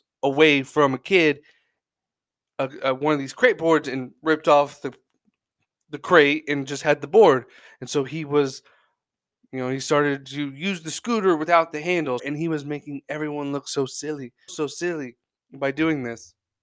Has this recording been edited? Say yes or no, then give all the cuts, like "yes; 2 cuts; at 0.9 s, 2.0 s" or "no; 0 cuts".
yes; 2 cuts; at 12.2 s, 14.5 s